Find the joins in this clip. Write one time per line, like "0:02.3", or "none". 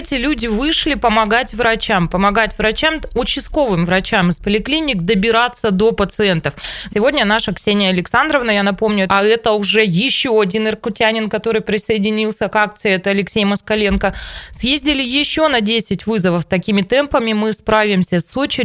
0:06.9
0:09.1